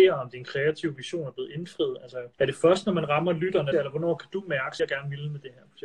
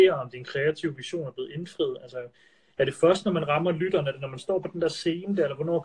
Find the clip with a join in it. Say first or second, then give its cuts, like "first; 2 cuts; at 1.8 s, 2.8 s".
first; 3 cuts; at 2.3 s, 3.7 s, 4.8 s